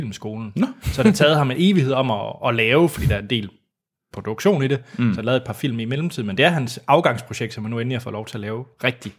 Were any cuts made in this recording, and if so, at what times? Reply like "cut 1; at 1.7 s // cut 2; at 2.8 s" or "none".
none

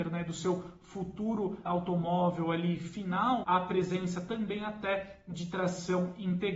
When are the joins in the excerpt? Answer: cut 1; at 1.7 s // cut 2; at 3.4 s

